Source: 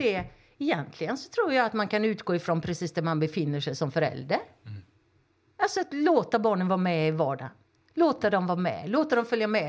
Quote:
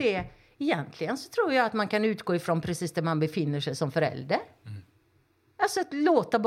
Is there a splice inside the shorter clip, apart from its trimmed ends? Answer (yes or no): no